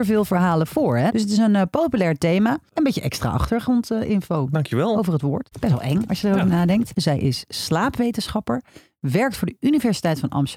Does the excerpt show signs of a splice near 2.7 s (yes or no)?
no